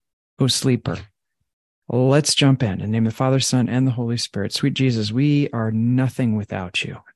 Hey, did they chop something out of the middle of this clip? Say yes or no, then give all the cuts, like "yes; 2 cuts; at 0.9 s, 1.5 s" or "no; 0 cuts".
yes; 1 cut; at 1.8 s